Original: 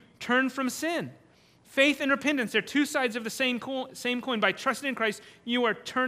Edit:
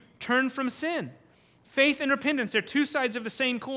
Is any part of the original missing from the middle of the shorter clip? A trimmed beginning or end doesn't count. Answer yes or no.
no